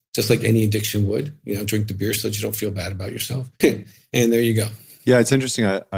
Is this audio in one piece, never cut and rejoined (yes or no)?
no